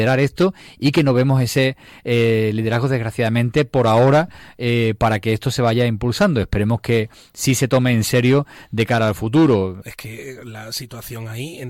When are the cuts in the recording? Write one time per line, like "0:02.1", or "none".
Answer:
0:09.8